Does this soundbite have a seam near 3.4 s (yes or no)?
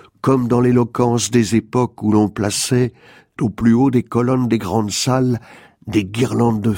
yes